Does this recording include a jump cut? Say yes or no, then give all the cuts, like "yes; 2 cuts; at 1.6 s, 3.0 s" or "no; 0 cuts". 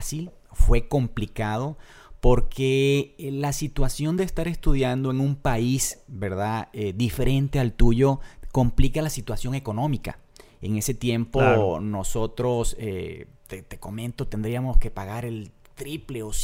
no; 0 cuts